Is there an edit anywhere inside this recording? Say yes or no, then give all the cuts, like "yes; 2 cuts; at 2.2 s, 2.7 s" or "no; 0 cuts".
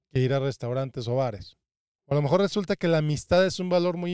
no; 0 cuts